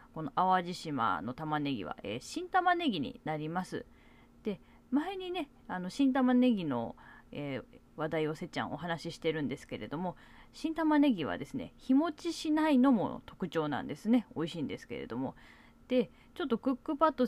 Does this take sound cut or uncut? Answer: uncut